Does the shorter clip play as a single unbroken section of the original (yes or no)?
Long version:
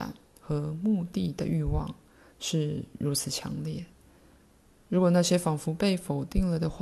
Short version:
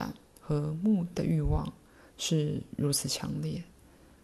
no